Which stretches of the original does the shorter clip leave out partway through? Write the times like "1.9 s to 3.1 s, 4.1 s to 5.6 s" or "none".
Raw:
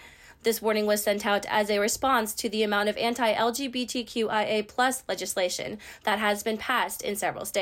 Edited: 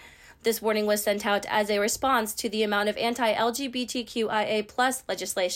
none